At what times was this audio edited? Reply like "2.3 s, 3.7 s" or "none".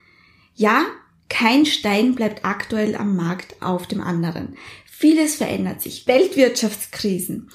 6.1 s